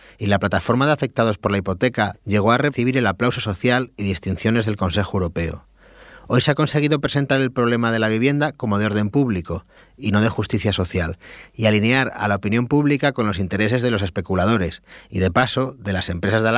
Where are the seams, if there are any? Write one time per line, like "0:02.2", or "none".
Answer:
0:02.1